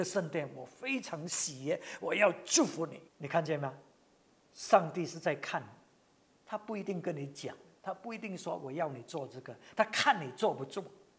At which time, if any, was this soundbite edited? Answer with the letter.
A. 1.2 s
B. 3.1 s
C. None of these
B